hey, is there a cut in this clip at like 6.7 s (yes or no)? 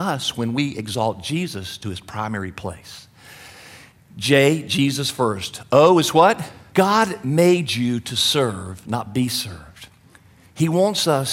yes